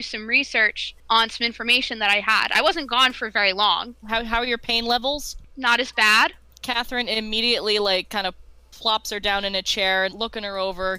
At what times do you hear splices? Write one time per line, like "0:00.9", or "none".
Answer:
0:04.0
0:10.1